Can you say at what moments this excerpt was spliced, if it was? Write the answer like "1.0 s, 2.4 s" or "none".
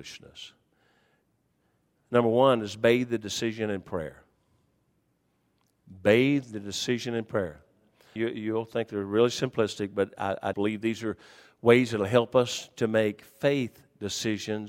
8.2 s, 10.5 s